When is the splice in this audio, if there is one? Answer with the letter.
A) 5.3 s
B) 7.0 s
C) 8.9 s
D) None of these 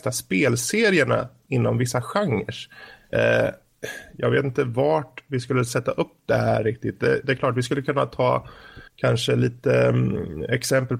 C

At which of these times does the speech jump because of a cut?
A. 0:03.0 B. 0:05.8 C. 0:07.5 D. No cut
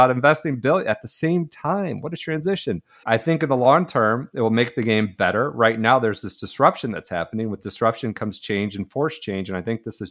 A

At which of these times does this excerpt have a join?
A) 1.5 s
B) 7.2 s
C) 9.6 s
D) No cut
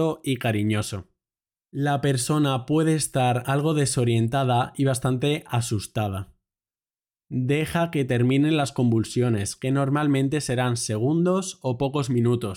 B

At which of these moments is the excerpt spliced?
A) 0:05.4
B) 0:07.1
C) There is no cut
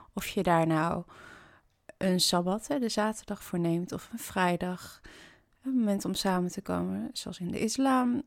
C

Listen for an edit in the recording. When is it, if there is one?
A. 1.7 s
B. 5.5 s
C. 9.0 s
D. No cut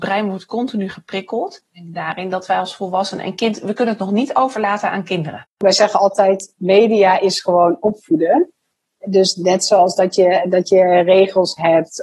D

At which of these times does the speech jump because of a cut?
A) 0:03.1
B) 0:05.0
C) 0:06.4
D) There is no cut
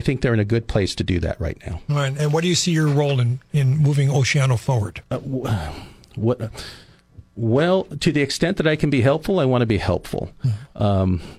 B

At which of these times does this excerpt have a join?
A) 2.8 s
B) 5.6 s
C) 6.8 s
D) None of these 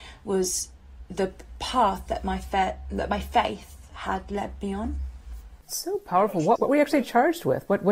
B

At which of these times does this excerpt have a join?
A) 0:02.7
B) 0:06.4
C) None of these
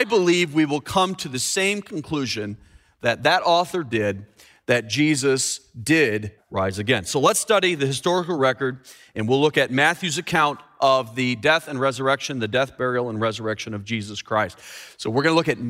B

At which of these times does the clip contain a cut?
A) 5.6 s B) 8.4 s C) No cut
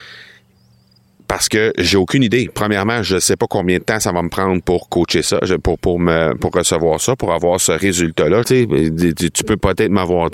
B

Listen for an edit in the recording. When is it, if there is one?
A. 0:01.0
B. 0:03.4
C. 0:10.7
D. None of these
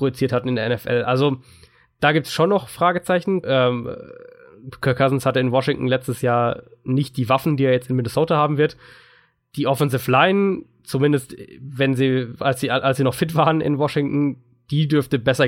B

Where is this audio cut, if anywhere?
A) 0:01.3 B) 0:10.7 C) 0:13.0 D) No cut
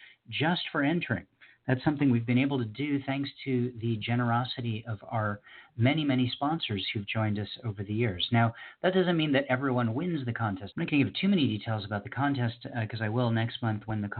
B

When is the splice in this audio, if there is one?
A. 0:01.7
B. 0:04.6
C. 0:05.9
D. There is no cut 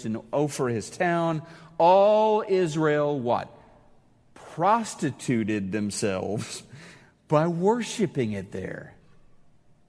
D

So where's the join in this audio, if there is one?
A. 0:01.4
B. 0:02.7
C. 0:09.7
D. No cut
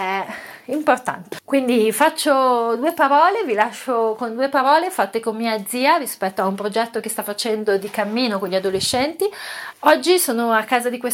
C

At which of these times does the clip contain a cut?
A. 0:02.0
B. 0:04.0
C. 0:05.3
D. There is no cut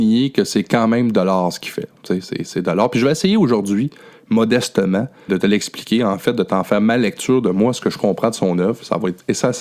C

